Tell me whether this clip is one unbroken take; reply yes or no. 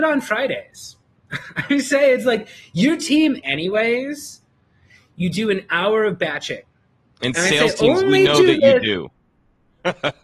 no